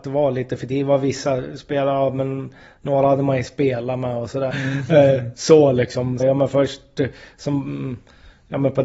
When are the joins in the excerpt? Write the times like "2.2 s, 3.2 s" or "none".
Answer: 4.5 s, 6.2 s